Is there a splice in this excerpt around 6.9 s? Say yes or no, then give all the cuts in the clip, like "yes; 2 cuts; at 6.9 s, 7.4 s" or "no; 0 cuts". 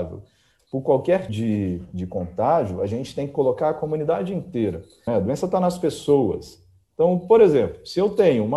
no; 2 cuts; at 1.3 s, 5.1 s